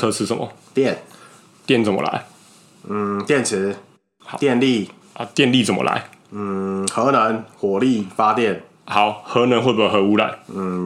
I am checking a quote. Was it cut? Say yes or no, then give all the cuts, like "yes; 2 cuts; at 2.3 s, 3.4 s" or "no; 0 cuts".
no; 0 cuts